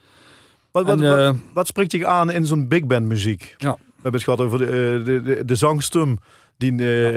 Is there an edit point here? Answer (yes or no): yes